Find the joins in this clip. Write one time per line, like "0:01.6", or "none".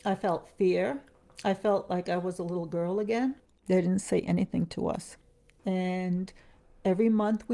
0:03.5
0:05.6